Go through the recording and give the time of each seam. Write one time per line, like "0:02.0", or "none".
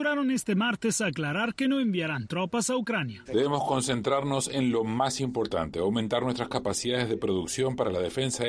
0:03.3